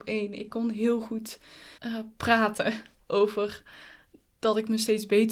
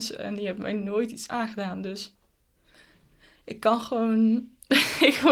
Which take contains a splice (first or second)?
first